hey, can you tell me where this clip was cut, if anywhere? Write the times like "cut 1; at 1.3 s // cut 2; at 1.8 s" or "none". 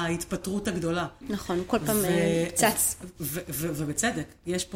cut 1; at 1.2 s